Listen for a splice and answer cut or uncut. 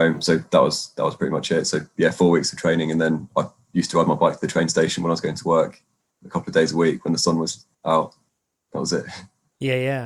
uncut